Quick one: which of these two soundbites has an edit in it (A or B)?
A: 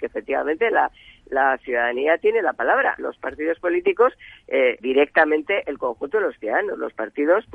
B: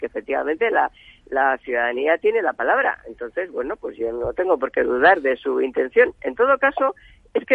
A